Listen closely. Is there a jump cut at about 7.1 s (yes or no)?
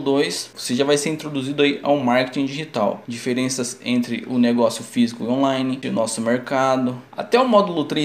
yes